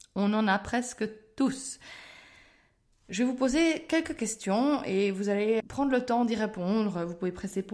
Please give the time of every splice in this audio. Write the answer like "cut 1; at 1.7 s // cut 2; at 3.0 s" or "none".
cut 1; at 5.6 s